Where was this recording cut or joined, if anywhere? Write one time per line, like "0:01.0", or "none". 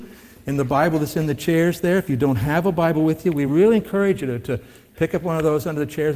none